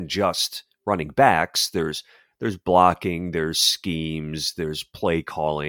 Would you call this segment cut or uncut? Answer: uncut